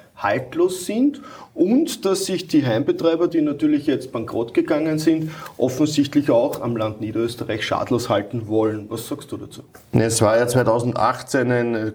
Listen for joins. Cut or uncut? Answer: uncut